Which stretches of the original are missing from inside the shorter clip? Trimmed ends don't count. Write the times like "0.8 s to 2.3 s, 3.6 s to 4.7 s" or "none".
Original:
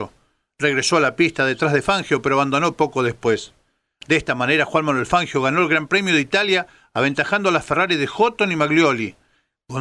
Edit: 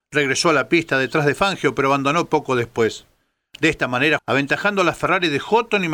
4.7 s to 6.9 s